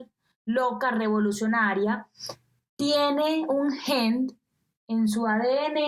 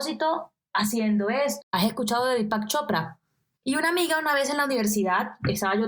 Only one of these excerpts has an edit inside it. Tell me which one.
second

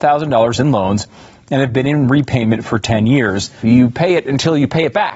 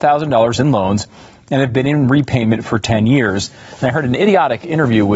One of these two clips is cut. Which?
first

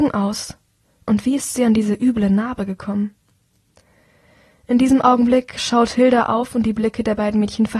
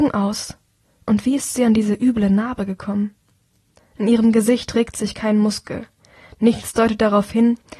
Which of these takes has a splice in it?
second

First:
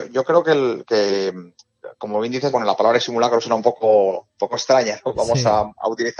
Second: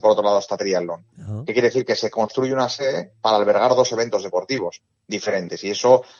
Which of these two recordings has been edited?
first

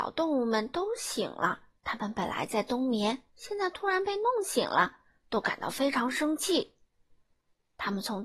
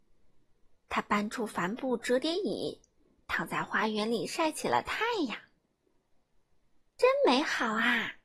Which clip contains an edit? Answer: first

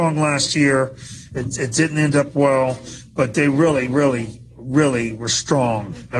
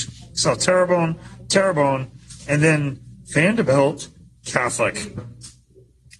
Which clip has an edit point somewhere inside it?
second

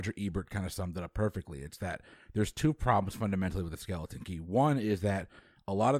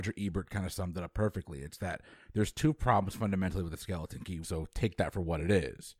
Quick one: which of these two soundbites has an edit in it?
second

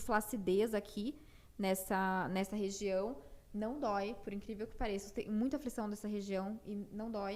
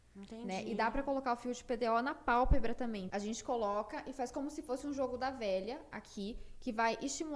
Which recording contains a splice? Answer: second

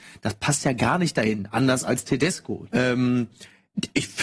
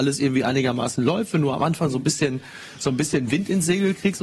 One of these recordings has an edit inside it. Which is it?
first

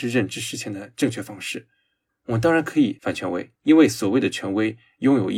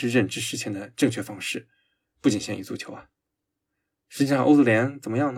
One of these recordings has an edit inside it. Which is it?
first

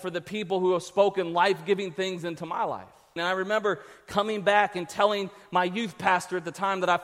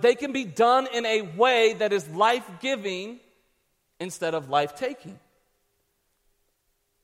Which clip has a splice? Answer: first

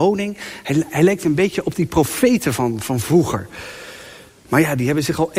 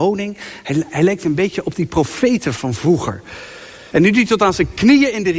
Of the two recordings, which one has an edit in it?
second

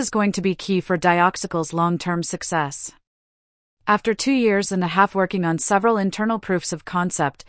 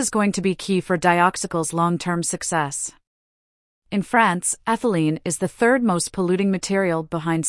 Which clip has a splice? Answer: second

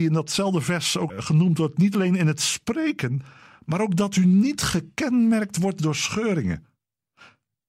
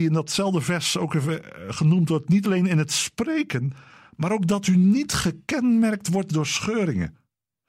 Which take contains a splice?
first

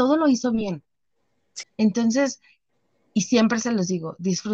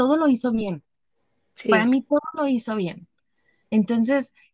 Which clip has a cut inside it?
first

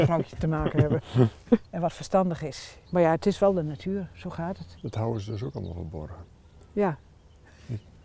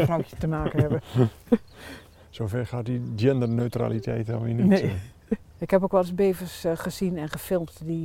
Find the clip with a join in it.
first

